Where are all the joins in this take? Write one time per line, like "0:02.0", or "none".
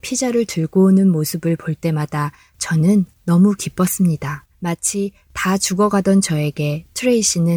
0:04.5